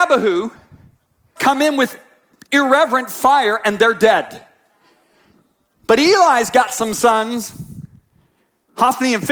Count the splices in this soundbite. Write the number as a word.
one